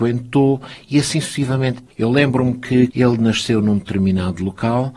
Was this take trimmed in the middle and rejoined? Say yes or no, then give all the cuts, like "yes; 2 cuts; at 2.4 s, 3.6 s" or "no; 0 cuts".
yes; 2 cuts; at 1.9 s, 2.9 s